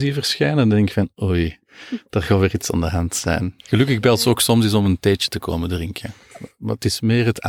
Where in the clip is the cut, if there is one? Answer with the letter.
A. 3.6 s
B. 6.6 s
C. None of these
A